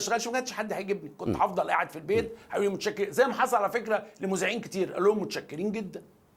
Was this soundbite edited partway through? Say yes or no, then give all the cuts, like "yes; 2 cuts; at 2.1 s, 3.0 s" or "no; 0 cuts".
no; 0 cuts